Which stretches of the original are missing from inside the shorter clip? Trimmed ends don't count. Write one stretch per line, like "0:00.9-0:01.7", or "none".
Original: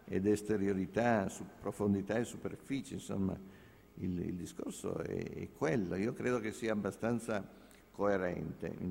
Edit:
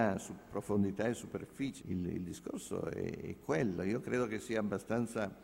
0:02.9-0:03.9